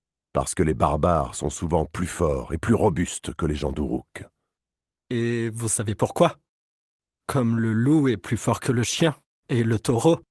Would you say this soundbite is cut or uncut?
uncut